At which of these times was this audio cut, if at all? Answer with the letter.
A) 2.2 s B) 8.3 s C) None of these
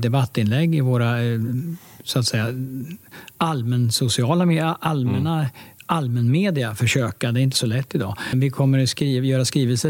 B